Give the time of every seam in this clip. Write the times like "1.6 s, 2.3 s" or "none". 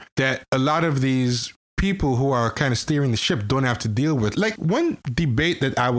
4.3 s